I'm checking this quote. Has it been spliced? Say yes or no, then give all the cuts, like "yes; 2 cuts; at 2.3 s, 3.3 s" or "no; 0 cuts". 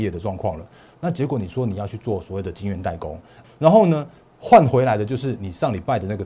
yes; 2 cuts; at 1.0 s, 3.4 s